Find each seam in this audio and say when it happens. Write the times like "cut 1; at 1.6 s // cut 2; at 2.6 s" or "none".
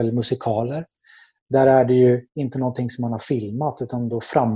none